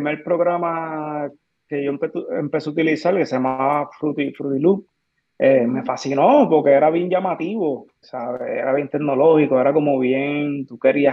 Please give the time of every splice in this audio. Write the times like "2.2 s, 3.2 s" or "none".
8.0 s

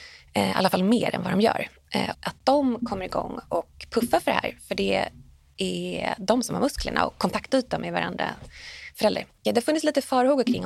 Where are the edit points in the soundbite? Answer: 2.1 s, 9.3 s

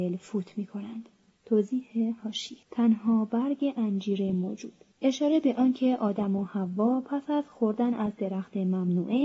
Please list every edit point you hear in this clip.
1.4 s, 2.6 s, 4.9 s

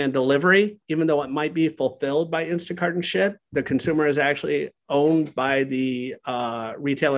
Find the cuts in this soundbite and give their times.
none

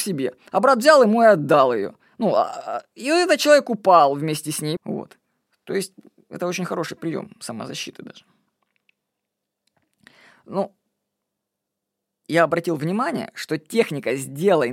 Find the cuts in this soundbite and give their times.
4.8 s

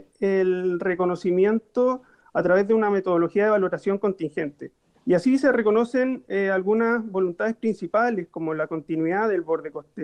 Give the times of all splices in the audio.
4.9 s

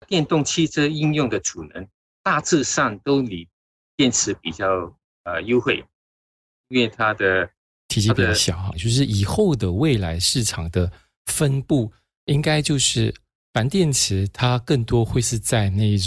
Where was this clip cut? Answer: 6.6 s, 8.7 s

